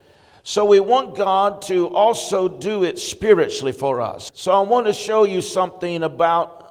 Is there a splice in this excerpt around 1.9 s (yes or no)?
no